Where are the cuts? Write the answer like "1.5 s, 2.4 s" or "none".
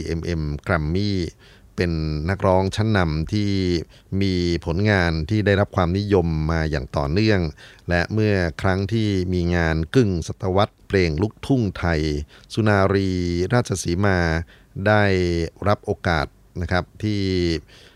10.8 s